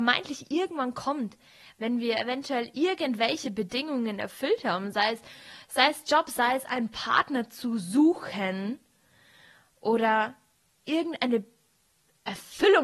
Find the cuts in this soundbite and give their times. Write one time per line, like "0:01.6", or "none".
none